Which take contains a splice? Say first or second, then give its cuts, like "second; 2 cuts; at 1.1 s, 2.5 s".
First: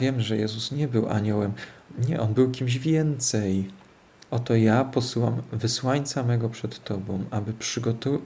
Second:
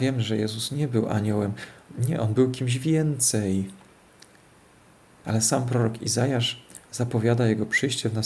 first; 1 cut; at 4.3 s